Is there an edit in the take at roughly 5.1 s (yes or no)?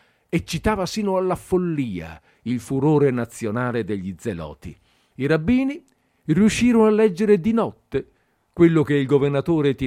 yes